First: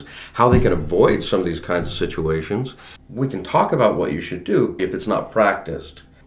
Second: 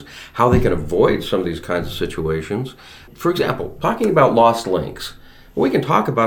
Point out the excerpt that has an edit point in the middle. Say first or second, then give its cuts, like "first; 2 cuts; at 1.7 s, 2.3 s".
first; 2 cuts; at 3.0 s, 4.8 s